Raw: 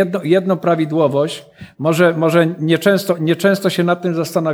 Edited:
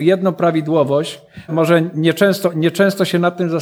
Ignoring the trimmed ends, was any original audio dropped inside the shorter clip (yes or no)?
yes